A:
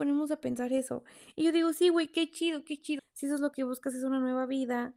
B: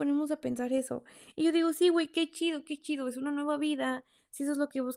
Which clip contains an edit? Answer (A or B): A